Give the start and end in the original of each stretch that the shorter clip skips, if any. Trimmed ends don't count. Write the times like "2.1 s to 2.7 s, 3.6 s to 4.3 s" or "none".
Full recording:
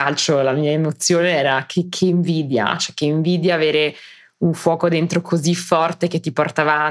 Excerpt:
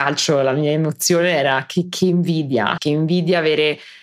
2.8 s to 2.9 s